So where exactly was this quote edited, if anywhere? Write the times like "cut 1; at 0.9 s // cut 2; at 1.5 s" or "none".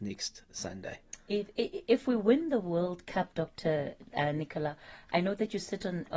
none